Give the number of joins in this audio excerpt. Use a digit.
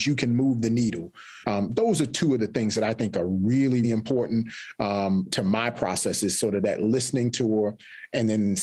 2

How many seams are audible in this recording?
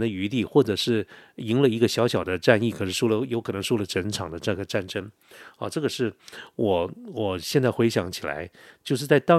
0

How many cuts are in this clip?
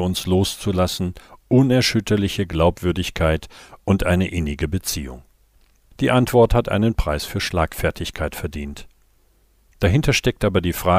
1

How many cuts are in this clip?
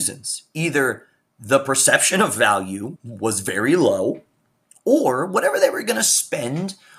1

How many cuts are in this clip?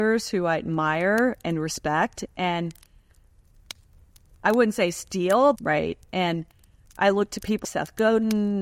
2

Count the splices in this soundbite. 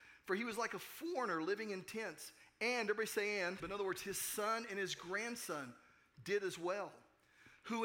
1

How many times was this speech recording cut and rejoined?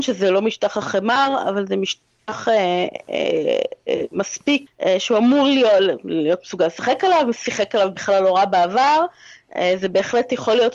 1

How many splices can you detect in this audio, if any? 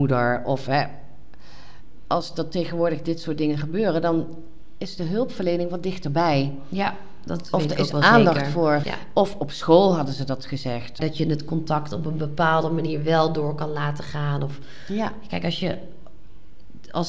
2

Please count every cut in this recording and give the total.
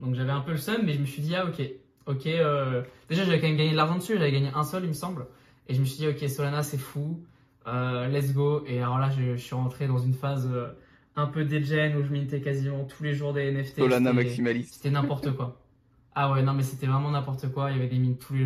0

